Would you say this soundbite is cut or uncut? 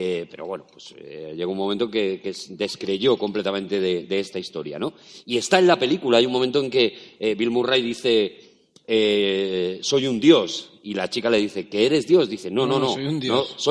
uncut